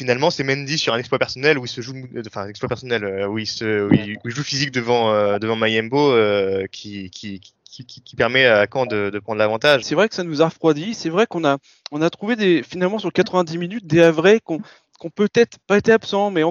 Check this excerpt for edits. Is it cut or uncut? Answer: cut